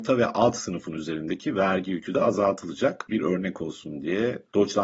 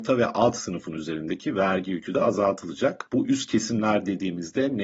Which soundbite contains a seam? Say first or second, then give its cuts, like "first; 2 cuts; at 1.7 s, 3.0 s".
first; 1 cut; at 3.1 s